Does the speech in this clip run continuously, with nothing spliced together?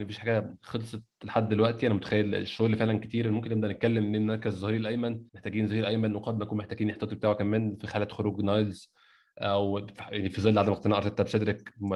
no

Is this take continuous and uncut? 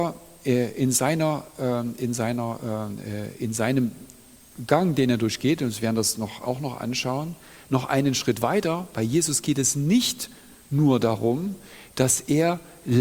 yes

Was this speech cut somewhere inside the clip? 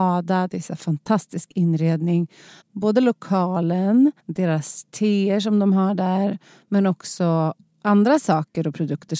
yes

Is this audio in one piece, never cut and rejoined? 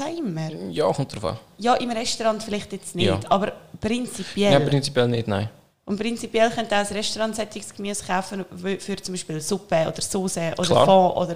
yes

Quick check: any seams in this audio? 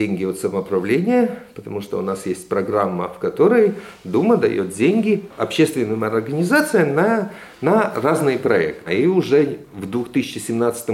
yes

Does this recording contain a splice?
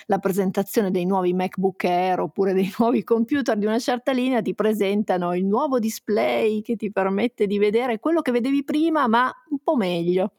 no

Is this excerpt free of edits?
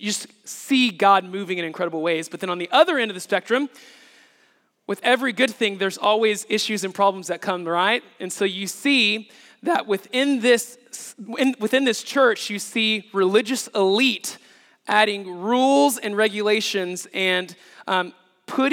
yes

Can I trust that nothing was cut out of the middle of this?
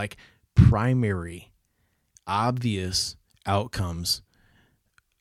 yes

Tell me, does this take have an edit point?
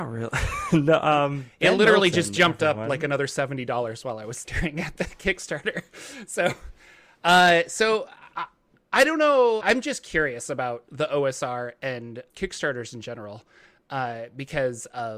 yes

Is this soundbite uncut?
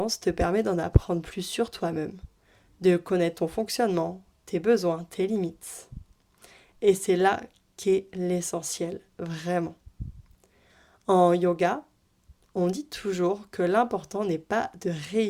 yes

